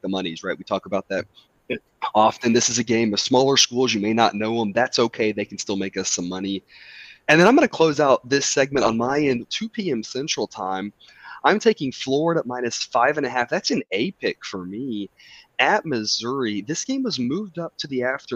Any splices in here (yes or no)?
yes